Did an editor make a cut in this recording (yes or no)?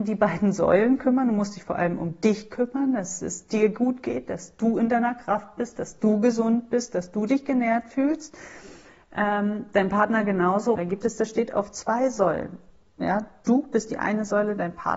yes